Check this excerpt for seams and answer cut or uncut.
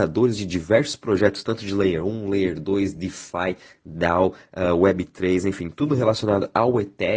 uncut